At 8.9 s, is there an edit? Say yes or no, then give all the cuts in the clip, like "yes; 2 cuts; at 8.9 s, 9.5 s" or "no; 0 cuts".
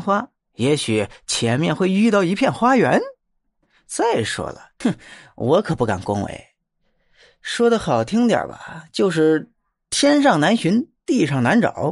no; 1 cut; at 4.8 s